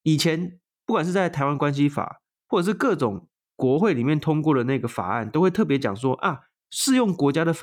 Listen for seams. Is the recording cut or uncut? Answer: uncut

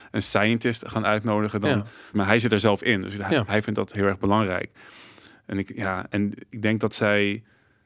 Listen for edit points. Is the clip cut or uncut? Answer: cut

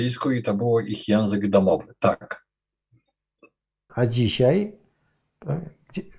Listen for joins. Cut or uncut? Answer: cut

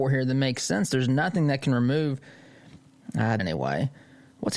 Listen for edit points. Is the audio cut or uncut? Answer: cut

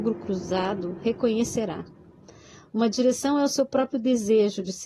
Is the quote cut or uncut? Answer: uncut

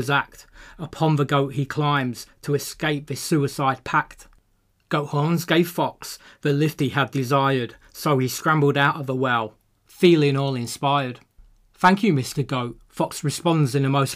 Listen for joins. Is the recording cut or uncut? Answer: uncut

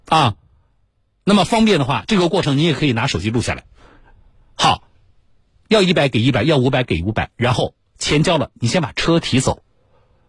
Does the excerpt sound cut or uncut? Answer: uncut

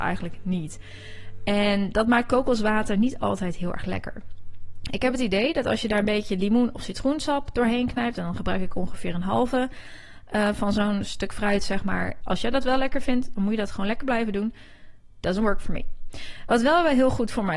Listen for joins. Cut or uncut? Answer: cut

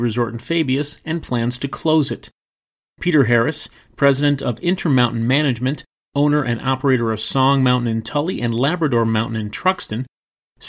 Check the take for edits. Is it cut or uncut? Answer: uncut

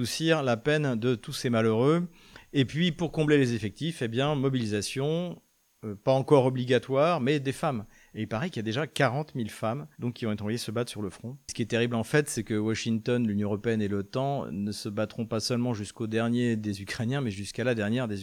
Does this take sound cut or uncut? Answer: cut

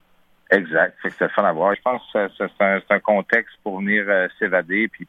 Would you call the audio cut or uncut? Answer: cut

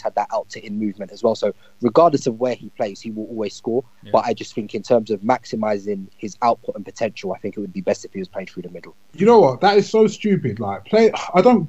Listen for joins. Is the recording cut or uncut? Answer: uncut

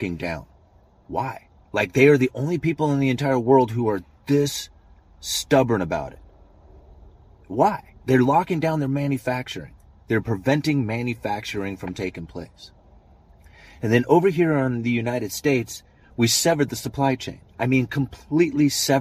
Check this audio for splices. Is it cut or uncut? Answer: cut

